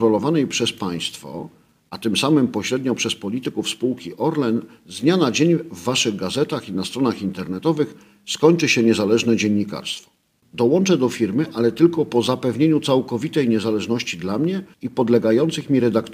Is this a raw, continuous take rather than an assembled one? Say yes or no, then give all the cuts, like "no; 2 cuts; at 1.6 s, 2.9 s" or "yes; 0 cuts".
no; 2 cuts; at 10.4 s, 14.7 s